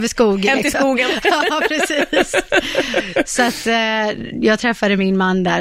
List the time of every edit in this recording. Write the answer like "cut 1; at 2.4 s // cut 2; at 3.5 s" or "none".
none